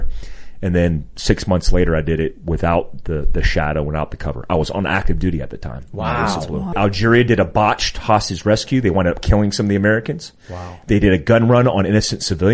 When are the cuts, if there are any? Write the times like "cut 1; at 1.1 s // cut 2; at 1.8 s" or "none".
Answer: cut 1; at 6.7 s